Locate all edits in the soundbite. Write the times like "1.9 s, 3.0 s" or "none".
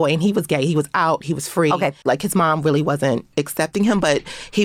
2.1 s